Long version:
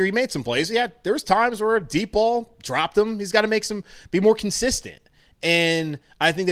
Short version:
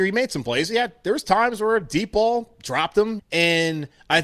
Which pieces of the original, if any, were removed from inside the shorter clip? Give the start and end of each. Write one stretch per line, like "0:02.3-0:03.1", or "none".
0:03.2-0:05.3